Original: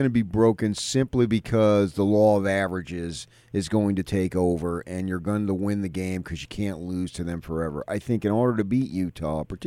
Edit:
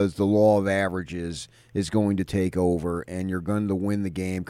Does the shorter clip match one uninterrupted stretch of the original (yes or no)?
yes